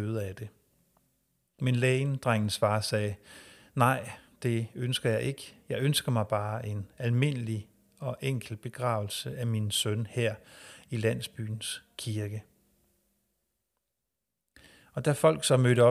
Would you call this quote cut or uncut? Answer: cut